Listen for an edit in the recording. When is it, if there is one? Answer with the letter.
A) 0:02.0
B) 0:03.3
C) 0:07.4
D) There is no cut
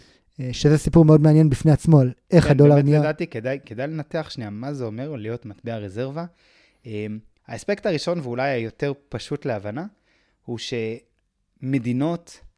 C